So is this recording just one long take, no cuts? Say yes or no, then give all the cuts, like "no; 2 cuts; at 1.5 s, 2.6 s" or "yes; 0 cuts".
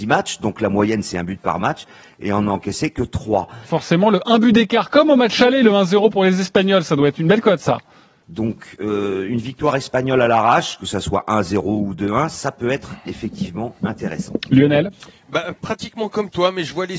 no; 2 cuts; at 3.7 s, 8.2 s